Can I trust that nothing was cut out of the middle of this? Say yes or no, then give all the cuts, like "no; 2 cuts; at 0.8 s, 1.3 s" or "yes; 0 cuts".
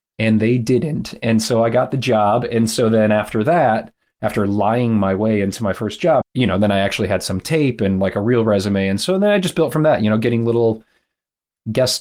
no; 1 cut; at 6.2 s